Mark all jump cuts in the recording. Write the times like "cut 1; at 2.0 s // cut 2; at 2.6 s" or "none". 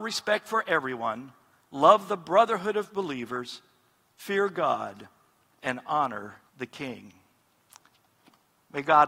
cut 1; at 6.5 s